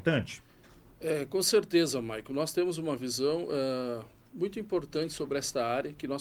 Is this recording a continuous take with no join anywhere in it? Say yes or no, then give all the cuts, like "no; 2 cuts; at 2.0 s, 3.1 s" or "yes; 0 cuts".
yes; 0 cuts